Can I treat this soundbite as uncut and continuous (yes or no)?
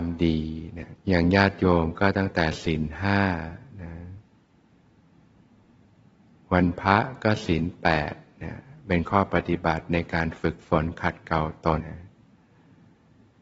no